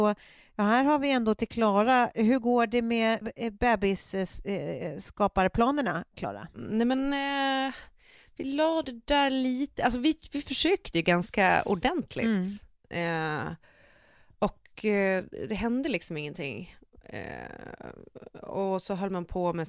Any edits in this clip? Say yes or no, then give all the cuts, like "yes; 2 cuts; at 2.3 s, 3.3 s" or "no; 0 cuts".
yes; 1 cut; at 3.2 s